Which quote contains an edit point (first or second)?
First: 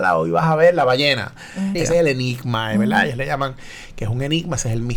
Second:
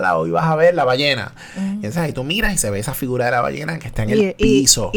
first